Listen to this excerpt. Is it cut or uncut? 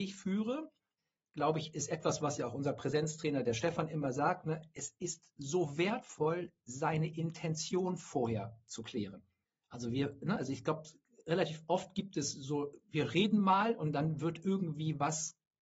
uncut